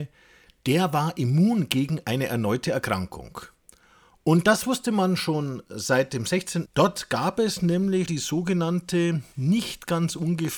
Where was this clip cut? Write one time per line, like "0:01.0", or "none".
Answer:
0:06.7
0:08.1